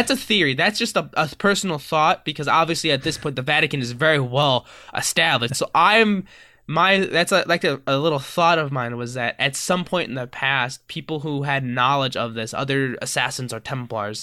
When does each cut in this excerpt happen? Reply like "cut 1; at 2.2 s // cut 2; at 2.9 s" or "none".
cut 1; at 5.5 s